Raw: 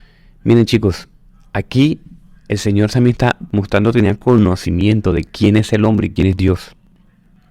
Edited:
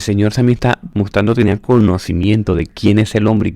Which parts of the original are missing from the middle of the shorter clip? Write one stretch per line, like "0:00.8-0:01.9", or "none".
none